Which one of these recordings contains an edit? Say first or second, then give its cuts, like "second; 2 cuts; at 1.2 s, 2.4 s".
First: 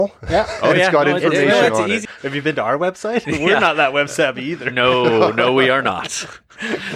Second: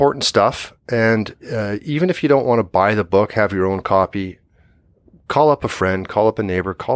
first; 1 cut; at 2.1 s